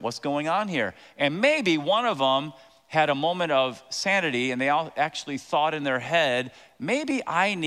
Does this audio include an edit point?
no; 0 cuts

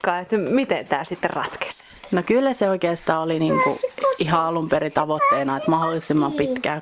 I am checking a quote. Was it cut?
no; 0 cuts

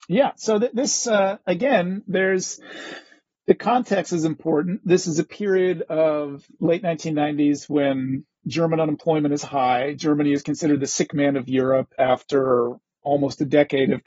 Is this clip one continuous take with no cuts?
yes; 0 cuts

